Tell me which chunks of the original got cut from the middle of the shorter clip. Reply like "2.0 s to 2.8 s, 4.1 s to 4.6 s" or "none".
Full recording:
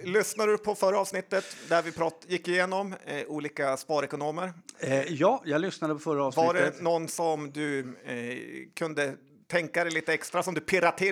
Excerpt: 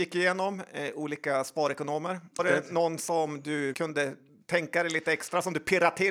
4.7 s to 6.5 s, 7.8 s to 8.7 s

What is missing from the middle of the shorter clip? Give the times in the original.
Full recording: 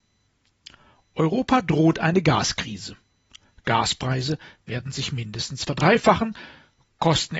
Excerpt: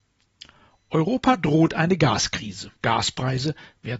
3.0 s to 3.6 s

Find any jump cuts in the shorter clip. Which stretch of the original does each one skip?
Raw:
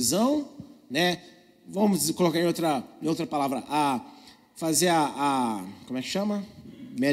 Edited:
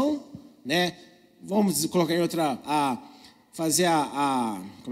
2.9 s to 3.7 s

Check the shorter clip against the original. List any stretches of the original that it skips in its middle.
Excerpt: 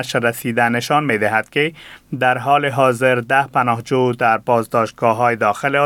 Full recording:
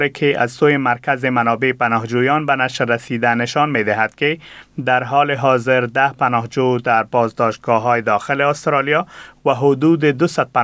none

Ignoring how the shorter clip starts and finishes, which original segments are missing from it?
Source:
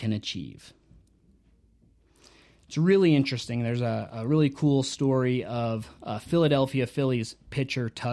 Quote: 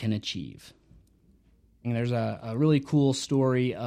1.8 s to 3.5 s

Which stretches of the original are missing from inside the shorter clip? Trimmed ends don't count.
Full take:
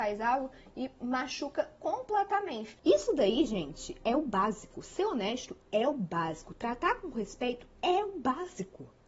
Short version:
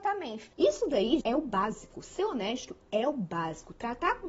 3.5 s to 4.0 s

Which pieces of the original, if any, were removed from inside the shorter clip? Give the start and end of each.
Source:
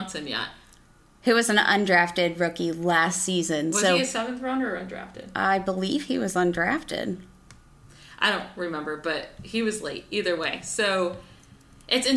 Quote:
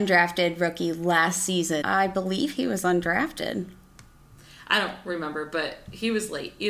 3.6 s to 5.3 s

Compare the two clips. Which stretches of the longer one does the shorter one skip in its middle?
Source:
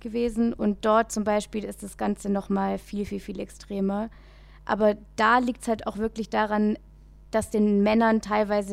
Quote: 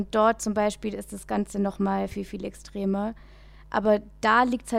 2.8 s to 3.0 s

